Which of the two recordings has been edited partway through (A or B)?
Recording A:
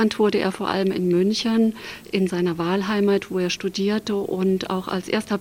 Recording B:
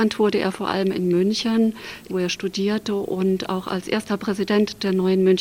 B